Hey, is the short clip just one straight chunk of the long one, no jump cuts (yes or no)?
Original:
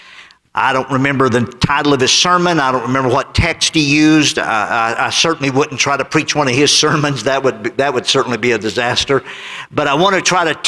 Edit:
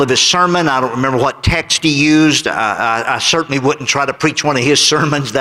yes